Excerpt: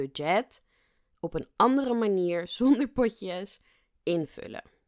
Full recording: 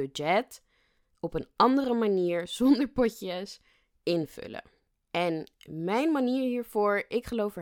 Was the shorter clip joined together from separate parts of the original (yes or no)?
no